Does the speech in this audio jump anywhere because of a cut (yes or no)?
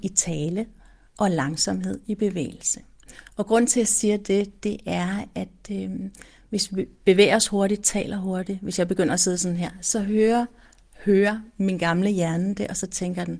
no